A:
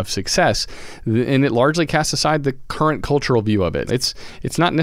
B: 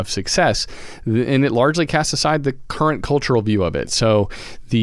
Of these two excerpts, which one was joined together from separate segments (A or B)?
A